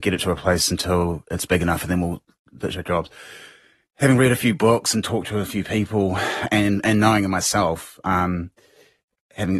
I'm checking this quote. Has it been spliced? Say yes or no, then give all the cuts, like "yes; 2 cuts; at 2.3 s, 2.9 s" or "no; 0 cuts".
no; 0 cuts